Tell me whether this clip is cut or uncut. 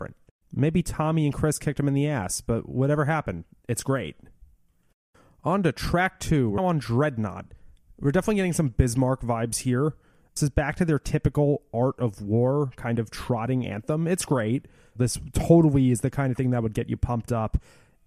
cut